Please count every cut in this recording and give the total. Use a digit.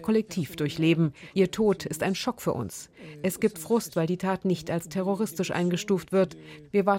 1